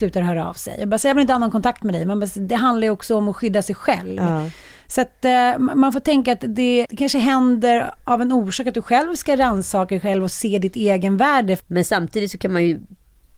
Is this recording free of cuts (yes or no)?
no